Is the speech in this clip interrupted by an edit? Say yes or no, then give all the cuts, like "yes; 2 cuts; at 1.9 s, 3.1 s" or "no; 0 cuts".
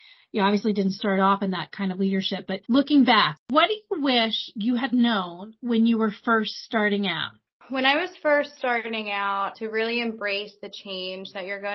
yes; 2 cuts; at 2.6 s, 9.5 s